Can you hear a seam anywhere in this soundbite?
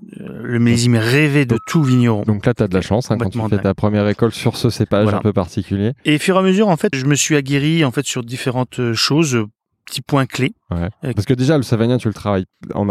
yes; 2 cuts; at 6.9 s, 11.1 s

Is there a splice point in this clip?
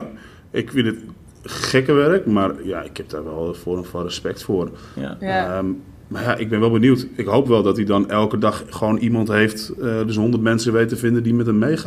no; 0 cuts

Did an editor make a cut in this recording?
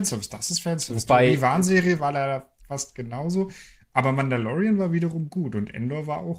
no; 0 cuts

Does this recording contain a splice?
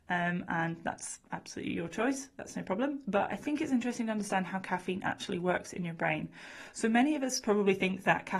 no; 0 cuts

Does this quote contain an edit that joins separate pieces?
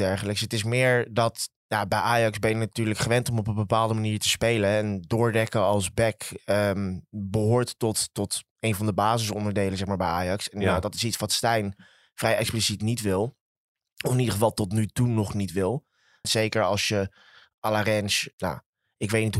yes; 2 cuts; at 16.2 s, 18.3 s

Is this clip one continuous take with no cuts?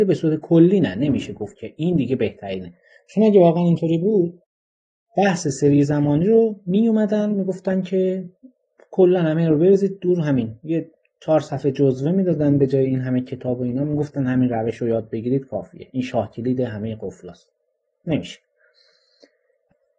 yes; 0 cuts

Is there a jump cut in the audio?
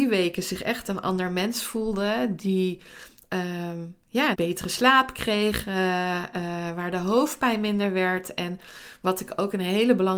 yes; 1 cut; at 4.3 s

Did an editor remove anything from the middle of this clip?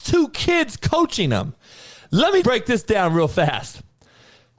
yes; 1 cut; at 2.4 s

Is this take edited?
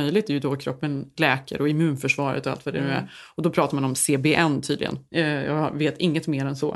no; 0 cuts

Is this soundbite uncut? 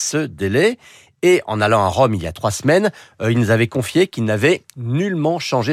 yes; 0 cuts

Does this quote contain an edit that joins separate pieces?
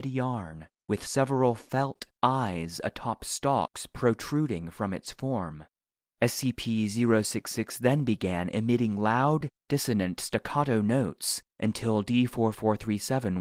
no; 0 cuts

